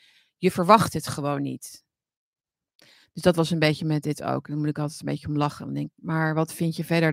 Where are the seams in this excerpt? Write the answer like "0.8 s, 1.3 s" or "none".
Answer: 6.0 s